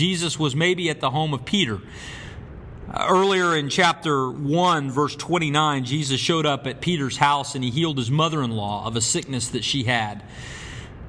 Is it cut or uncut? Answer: uncut